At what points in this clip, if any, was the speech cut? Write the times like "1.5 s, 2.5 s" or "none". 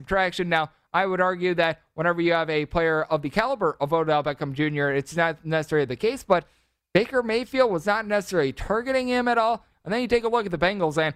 9.7 s